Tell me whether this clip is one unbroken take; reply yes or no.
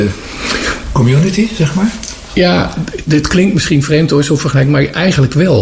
no